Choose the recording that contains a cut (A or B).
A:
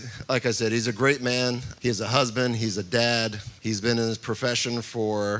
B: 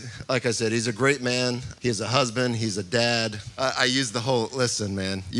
B